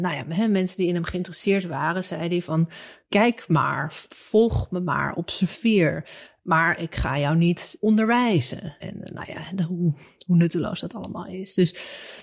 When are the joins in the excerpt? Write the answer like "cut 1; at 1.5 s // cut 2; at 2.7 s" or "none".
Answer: cut 1; at 8.8 s